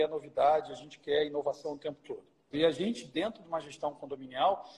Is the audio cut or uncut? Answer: cut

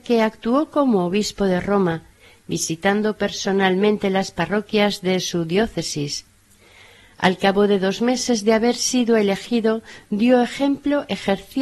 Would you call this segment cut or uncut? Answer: uncut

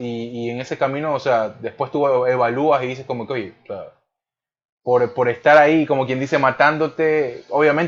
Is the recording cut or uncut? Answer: uncut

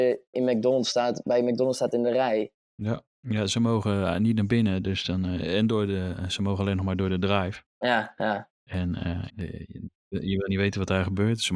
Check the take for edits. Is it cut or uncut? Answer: cut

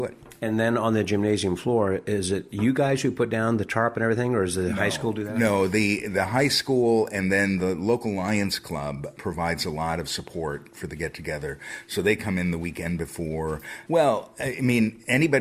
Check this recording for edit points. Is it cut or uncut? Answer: cut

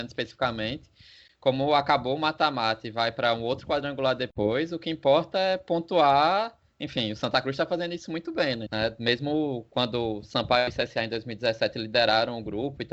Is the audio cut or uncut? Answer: cut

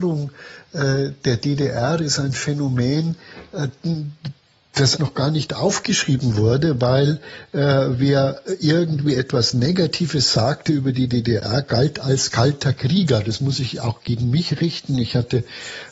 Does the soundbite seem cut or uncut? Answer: cut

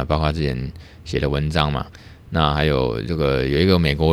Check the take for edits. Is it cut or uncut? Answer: uncut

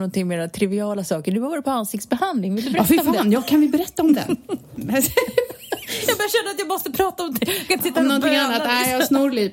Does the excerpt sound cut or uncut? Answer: uncut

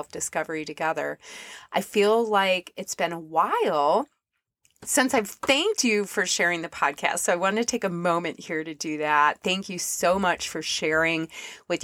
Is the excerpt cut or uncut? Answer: uncut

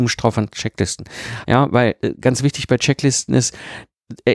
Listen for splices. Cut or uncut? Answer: cut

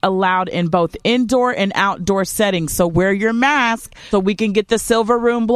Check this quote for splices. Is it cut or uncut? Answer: cut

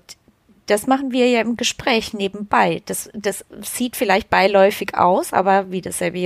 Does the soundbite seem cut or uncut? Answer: uncut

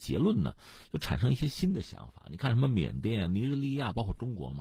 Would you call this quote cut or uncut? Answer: uncut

